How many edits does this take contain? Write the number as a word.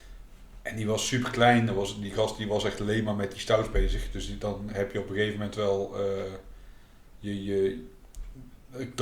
zero